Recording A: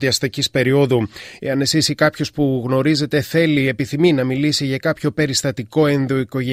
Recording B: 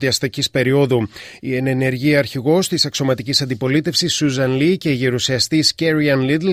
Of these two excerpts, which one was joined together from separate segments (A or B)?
A